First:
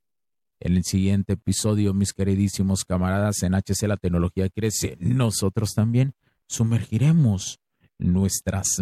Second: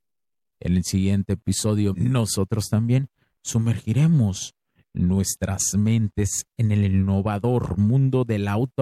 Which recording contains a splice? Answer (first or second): second